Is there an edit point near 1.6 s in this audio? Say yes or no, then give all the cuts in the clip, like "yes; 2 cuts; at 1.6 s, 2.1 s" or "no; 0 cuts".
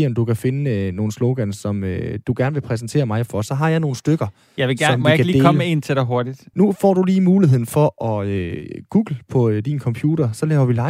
no; 1 cut; at 6.5 s